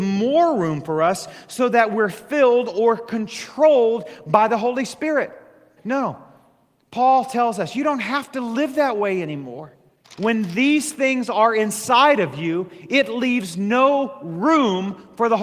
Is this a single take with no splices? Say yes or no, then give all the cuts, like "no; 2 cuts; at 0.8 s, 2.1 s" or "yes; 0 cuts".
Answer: no; 2 cuts; at 5.8 s, 10.0 s